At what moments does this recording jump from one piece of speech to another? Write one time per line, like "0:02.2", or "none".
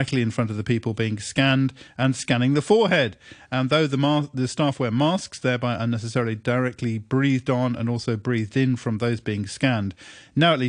none